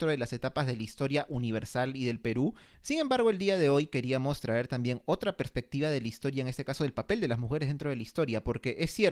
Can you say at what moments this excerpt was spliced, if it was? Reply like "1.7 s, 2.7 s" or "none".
2.7 s